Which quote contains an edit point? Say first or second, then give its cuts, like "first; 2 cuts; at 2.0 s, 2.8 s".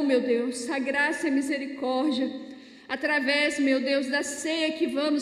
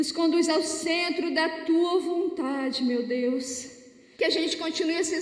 second; 1 cut; at 4.1 s